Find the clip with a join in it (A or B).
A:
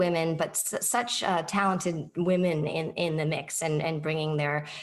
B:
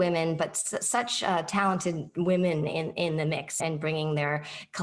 B